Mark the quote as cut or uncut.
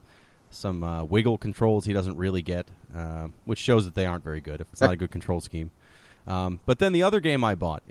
cut